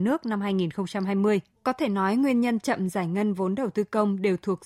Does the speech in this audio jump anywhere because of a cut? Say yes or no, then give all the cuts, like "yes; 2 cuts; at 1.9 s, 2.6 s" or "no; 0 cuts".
yes; 1 cut; at 1.6 s